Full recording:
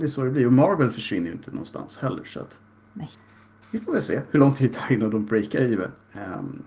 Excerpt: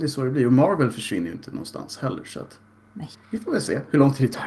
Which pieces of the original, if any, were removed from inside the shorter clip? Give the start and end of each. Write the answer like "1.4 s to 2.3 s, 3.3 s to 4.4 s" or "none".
3.2 s to 3.6 s